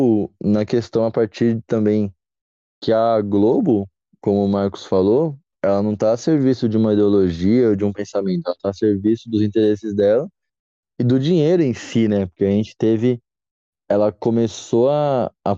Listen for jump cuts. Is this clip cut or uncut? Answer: uncut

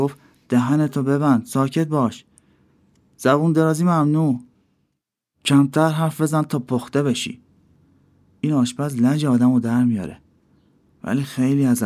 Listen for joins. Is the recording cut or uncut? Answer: uncut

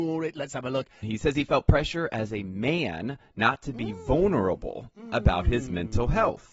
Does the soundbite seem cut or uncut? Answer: cut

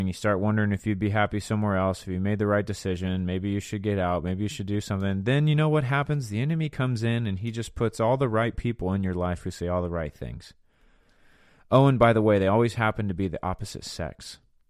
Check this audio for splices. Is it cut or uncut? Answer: uncut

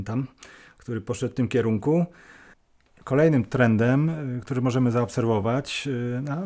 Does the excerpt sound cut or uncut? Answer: uncut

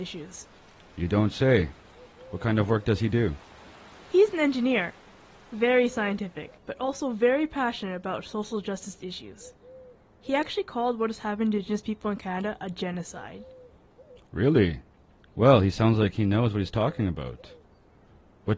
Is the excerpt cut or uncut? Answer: cut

